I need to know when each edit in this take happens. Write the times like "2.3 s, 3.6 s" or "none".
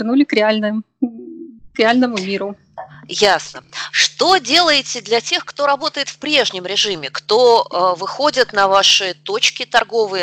none